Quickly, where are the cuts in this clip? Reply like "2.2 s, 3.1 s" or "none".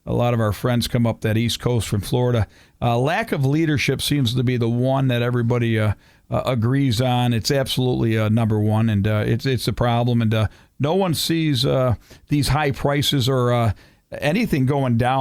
none